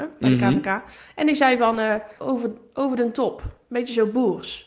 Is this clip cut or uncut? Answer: cut